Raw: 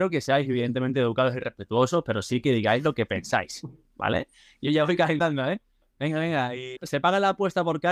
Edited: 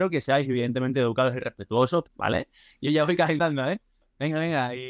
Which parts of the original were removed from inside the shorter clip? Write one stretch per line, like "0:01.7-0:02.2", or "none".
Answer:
0:02.0-0:03.8